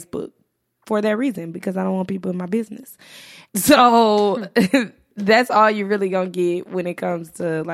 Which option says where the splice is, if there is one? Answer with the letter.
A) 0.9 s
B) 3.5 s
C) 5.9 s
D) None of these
B